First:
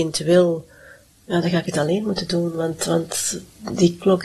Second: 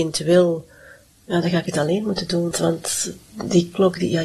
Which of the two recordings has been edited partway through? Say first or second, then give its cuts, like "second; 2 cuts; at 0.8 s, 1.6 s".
second; 1 cut; at 2.5 s